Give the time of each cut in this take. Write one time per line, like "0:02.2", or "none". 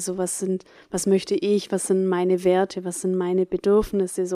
none